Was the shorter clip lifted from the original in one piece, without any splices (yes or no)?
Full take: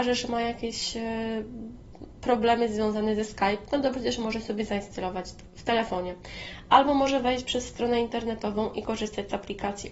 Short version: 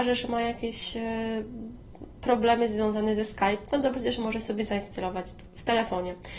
yes